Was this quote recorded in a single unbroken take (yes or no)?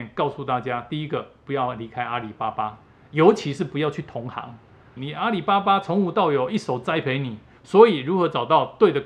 no